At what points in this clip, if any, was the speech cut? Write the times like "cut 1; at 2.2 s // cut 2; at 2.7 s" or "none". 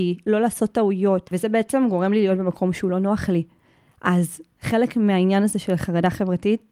none

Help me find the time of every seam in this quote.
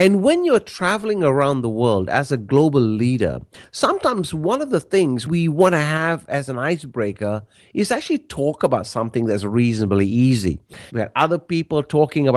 cut 1; at 10.9 s

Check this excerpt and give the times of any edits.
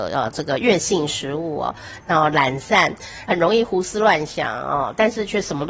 cut 1; at 2.0 s // cut 2; at 3.3 s

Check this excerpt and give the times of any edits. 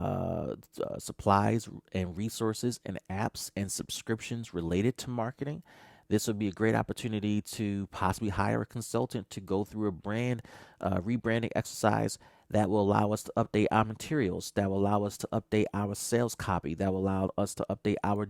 none

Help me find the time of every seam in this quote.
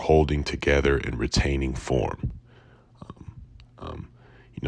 cut 1; at 3.8 s

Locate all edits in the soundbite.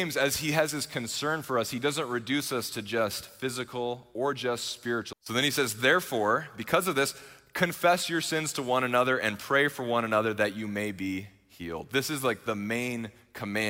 cut 1; at 5.1 s

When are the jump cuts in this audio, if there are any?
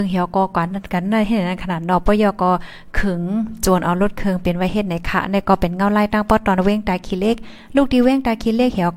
none

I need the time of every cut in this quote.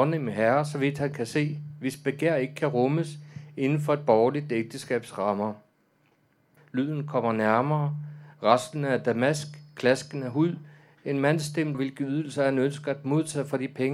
cut 1; at 6.6 s // cut 2; at 11.7 s

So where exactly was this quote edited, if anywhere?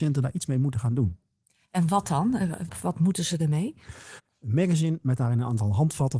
cut 1; at 2.7 s // cut 2; at 4.2 s

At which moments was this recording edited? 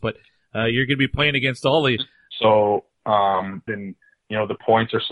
cut 1; at 2.3 s // cut 2; at 3.7 s

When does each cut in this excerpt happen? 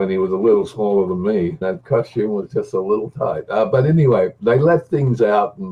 cut 1; at 1.6 s

